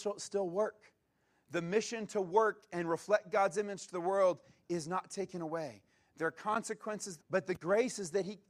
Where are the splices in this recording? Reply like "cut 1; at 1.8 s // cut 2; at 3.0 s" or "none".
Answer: cut 1; at 7.2 s